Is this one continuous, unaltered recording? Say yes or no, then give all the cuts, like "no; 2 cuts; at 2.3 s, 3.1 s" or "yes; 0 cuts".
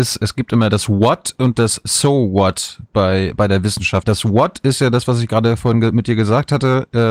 no; 1 cut; at 4.0 s